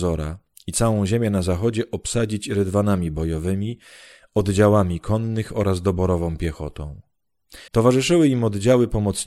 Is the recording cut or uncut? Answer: cut